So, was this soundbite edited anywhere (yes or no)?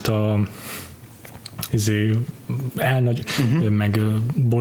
yes